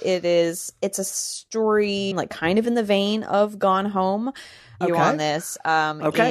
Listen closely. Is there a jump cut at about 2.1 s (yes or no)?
yes